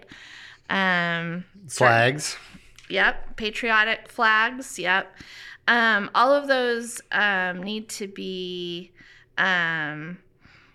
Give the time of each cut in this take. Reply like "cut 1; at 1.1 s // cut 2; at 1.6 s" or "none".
none